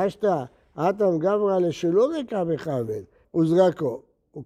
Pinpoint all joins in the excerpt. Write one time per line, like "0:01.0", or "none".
0:03.2